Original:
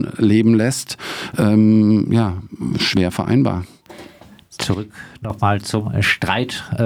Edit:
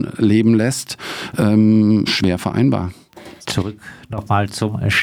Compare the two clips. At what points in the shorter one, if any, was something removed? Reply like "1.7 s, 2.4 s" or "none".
2.1 s, 3.4 s